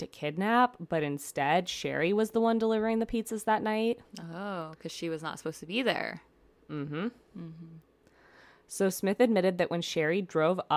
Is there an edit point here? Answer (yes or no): no